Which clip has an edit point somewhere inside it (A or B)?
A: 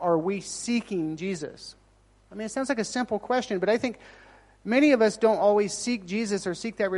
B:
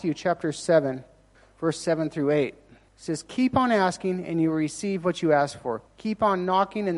B